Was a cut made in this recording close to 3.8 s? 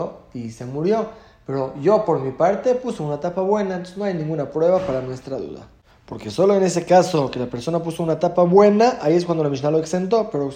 no; 0 cuts

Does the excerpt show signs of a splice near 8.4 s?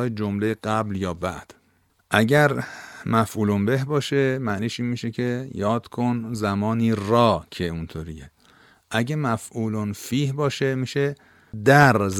no; 0 cuts

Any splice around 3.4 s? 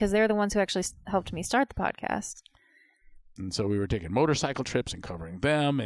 yes; 1 cut; at 3.4 s

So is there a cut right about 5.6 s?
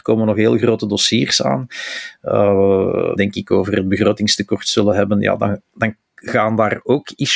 yes; 2 cuts; at 3.2 s, 5.6 s

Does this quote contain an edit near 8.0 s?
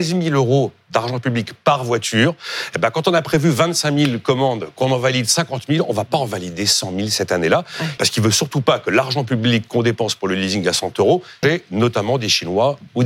yes; 2 cuts; at 8.0 s, 11.4 s

